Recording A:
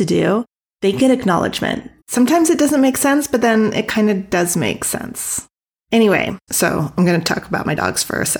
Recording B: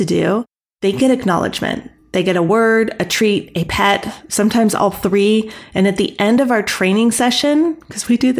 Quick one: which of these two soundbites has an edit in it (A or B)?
A